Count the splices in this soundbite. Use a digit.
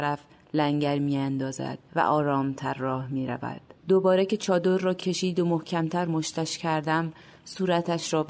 2